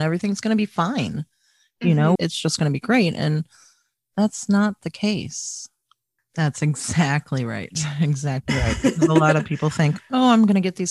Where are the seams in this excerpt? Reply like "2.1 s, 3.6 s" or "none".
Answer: 2.2 s, 6.2 s